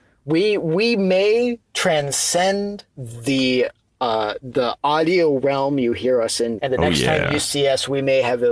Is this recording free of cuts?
no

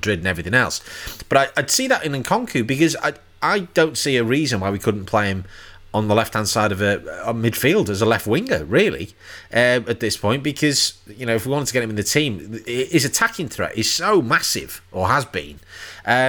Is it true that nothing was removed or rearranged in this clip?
yes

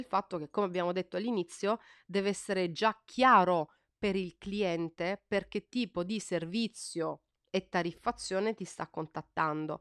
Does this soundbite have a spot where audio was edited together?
no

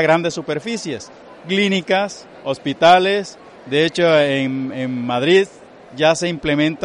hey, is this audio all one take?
yes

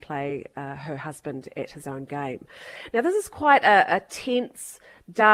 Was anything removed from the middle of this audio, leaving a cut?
no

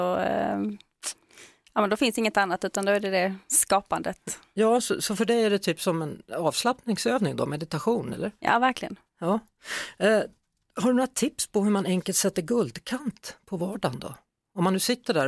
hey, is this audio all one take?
yes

